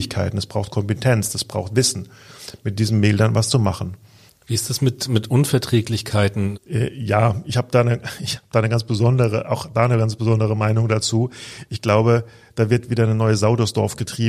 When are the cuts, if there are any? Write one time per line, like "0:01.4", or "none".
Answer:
0:04.3
0:06.5